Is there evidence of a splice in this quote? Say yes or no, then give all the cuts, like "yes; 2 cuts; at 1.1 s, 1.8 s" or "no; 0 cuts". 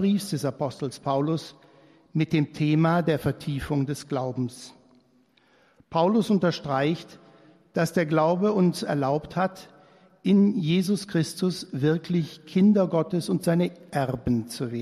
no; 0 cuts